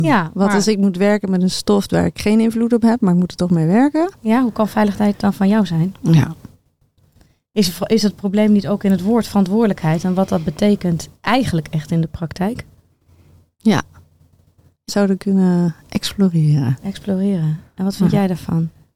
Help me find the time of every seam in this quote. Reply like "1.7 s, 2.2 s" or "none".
14.9 s